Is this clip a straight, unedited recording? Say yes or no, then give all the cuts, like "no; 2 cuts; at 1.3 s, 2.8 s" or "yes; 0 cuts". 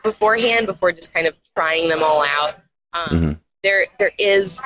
yes; 0 cuts